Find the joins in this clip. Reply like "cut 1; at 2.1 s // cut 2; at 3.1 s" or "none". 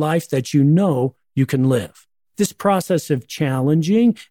cut 1; at 2.3 s